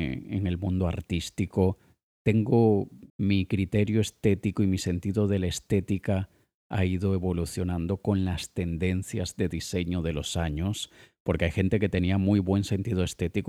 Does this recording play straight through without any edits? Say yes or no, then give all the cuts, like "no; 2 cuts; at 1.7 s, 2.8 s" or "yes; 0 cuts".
no; 1 cut; at 3.1 s